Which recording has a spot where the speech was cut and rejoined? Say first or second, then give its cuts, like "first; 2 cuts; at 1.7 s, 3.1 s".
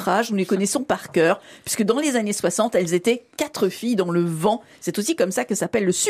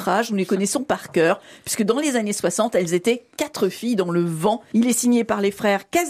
second; 1 cut; at 4.7 s